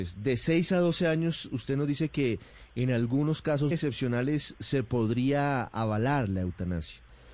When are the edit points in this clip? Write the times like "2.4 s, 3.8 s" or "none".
3.7 s